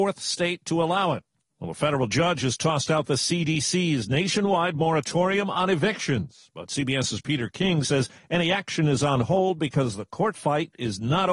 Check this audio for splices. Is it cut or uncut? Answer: cut